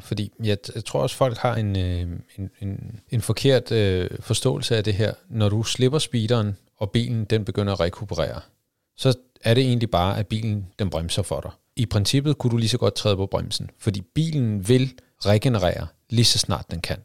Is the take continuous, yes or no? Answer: yes